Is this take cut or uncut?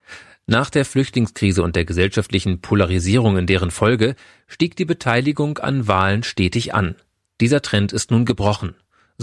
uncut